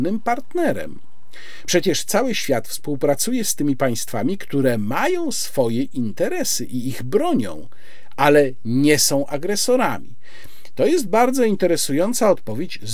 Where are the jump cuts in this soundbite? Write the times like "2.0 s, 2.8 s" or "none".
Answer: 1.7 s